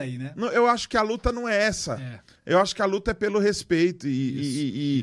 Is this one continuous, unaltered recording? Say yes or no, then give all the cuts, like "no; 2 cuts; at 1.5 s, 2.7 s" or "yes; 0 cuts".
yes; 0 cuts